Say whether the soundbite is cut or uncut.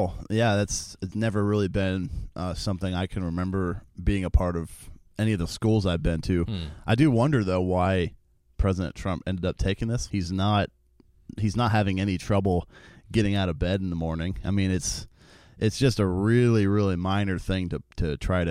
cut